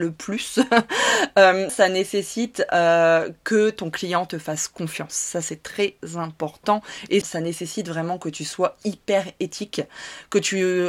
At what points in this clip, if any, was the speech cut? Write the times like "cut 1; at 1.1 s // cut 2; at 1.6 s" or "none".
cut 1; at 1.7 s // cut 2; at 7.2 s